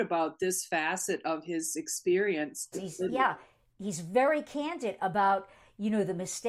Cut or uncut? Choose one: cut